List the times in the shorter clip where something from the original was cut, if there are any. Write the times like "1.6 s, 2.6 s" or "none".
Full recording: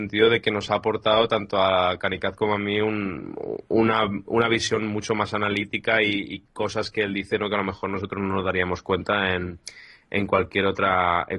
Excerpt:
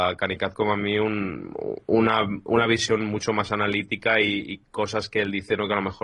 none